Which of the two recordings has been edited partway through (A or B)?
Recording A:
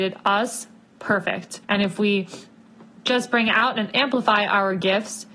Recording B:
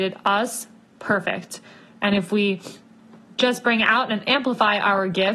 A